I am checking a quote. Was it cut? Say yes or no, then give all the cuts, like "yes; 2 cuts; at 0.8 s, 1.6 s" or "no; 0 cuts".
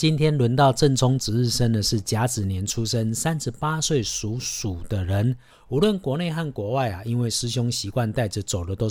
yes; 1 cut; at 5.5 s